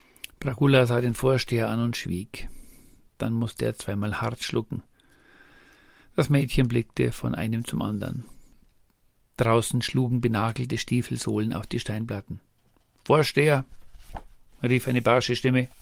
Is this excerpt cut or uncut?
uncut